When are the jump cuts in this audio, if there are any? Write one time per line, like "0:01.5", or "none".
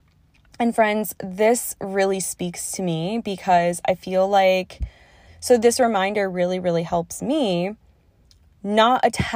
0:05.3